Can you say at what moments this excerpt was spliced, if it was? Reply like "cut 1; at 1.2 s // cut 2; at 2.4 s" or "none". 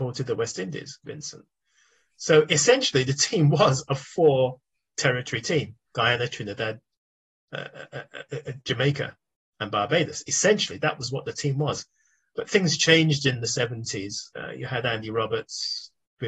cut 1; at 1.0 s